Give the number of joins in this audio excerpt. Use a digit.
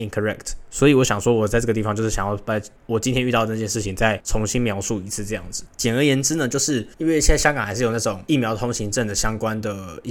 2